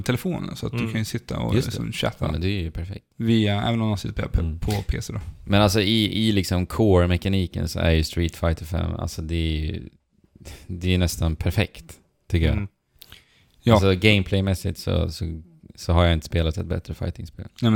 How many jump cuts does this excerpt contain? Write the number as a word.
one